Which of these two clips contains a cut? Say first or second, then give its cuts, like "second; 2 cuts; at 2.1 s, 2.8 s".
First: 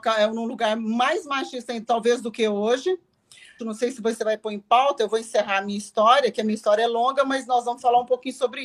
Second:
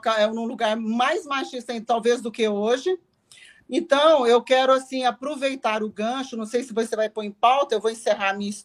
first; 1 cut; at 3.6 s